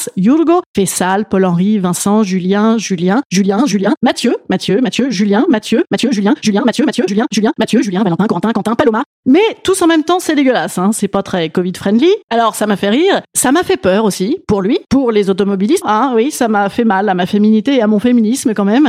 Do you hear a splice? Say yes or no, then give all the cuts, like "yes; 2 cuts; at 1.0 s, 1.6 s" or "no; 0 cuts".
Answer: yes; 3 cuts; at 7.1 s, 12.3 s, 15.8 s